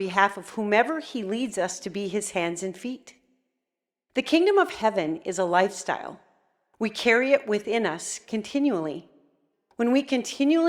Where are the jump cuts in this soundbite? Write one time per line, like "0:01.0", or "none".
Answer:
0:09.5